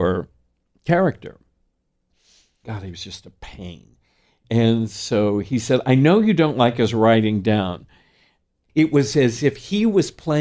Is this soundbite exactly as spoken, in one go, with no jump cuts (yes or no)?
no